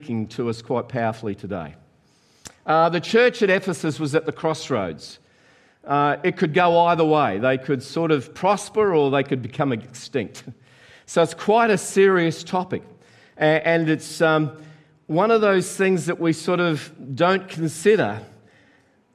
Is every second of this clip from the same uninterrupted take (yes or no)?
yes